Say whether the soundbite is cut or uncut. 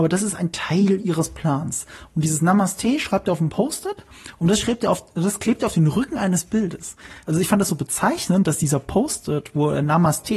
cut